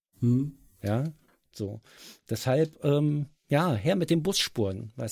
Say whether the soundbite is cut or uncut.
uncut